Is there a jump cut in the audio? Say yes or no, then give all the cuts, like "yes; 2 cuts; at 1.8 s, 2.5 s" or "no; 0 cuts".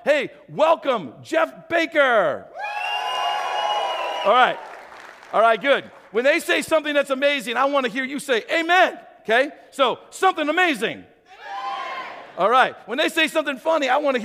no; 0 cuts